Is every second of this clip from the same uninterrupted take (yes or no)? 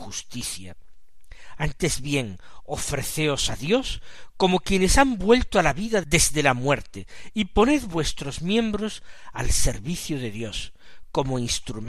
yes